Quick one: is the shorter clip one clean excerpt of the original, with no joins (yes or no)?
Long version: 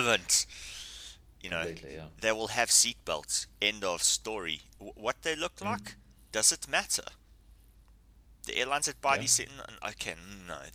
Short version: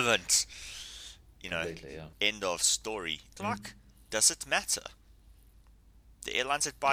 no